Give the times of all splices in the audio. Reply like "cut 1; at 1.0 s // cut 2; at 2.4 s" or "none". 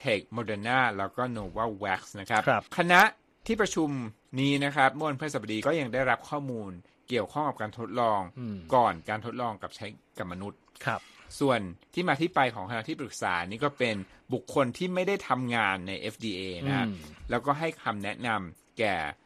cut 1; at 2.7 s